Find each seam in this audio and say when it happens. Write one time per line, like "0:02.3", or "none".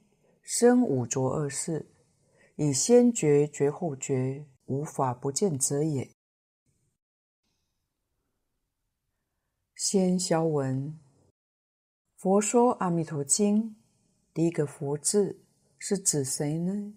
0:04.6